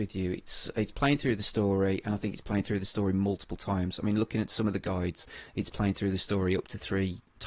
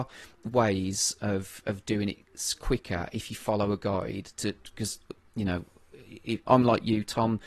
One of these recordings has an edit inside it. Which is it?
second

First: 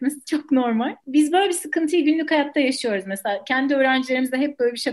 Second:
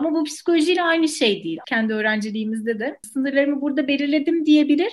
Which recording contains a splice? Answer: second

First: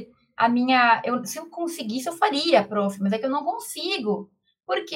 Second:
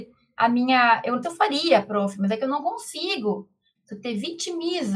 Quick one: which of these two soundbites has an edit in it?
second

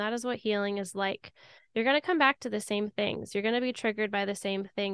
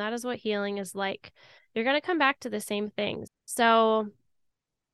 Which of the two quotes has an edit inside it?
second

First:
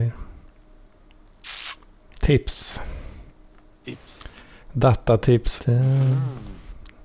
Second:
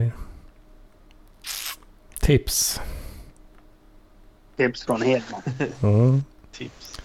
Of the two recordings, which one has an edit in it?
first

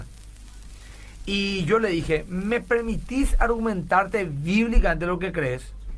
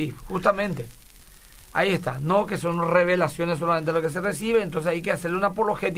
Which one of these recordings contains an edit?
second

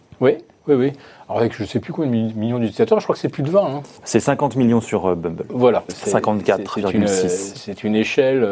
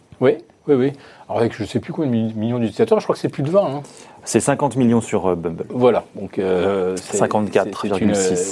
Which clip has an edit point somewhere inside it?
first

